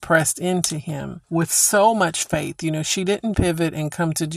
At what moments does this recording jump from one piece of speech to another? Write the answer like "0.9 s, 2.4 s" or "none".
1.2 s, 3.3 s